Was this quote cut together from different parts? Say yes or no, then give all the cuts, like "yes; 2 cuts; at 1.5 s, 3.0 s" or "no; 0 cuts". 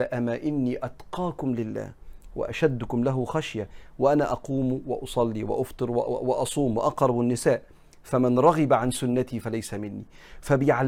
no; 0 cuts